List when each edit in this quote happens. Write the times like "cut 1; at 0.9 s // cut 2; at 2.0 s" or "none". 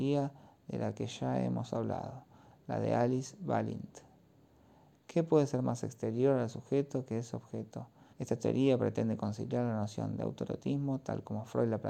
cut 1; at 4.9 s // cut 2; at 8.1 s